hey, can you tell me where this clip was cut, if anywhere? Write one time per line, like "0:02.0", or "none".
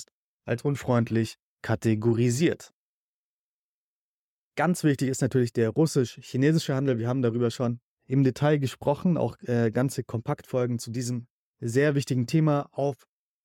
none

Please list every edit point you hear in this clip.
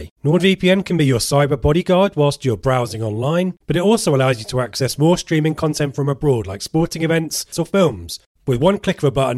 0:07.5

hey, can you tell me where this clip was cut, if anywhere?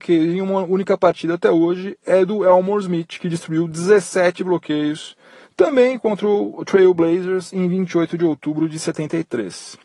none

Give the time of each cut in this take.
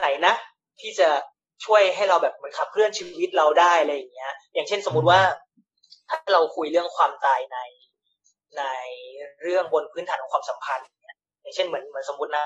none

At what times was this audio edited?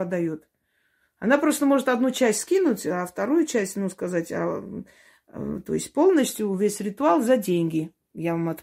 none

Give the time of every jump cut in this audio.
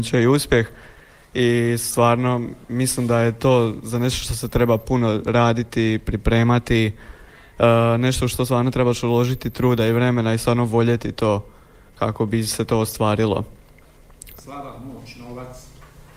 0:14.4

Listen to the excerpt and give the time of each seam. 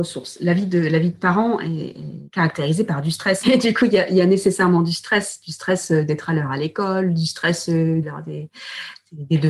0:03.4
0:08.0

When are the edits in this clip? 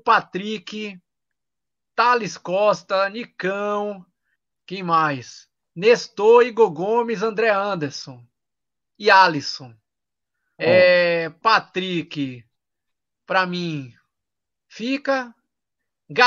0:10.6

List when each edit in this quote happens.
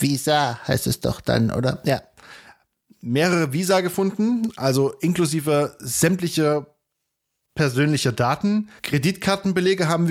0:08.8

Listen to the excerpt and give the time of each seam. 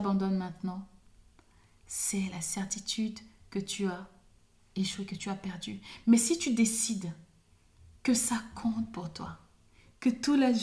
none

